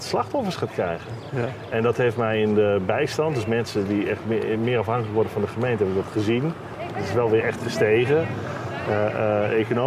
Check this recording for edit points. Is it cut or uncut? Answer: uncut